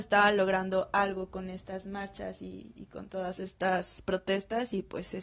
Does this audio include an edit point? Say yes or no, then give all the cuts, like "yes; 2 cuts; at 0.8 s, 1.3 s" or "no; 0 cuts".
no; 0 cuts